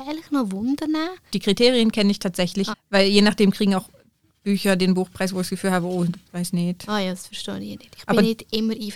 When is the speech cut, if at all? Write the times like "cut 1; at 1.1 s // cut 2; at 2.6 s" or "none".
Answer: cut 1; at 1.3 s // cut 2; at 2.7 s // cut 3; at 6.2 s